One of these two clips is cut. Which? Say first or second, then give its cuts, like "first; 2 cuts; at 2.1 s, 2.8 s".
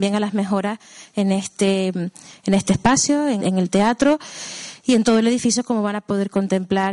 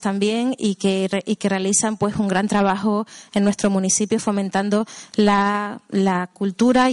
first; 1 cut; at 3.4 s